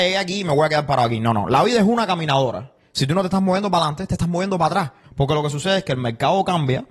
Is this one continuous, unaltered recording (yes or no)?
no